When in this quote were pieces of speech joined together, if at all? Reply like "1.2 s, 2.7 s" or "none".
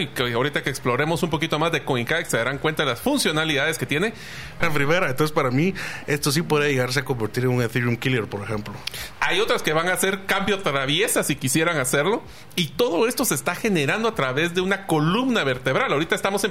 4.6 s, 9.1 s